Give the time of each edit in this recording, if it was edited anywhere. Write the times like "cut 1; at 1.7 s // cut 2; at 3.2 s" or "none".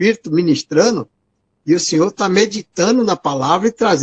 none